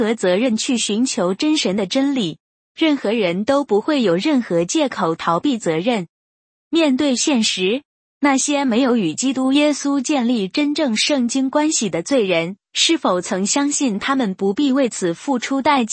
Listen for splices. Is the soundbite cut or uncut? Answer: uncut